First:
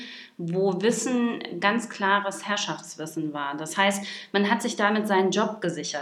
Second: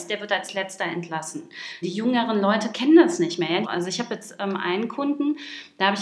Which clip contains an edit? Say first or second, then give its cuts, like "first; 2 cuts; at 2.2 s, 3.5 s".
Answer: second; 2 cuts; at 1.8 s, 3.6 s